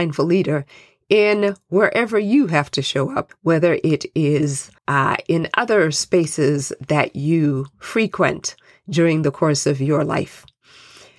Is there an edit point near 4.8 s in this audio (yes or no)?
yes